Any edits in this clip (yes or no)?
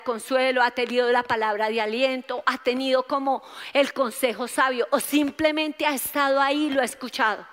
no